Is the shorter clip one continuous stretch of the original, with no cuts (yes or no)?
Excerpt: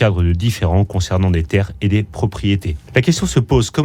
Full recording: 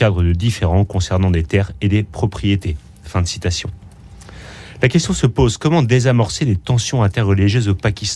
no